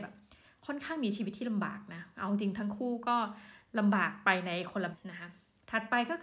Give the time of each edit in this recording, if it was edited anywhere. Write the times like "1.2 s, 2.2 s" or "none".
4.9 s